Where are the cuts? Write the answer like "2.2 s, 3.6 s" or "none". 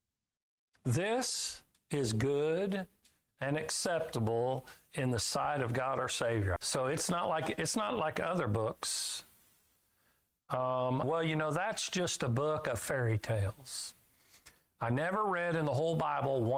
6.6 s, 11.0 s